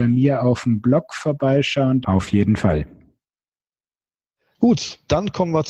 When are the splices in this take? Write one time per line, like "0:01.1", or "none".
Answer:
0:02.0